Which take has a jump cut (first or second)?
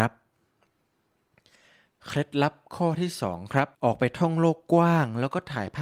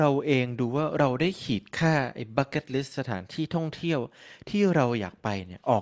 first